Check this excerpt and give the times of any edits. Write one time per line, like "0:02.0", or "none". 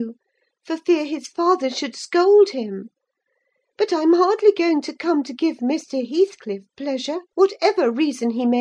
0:07.2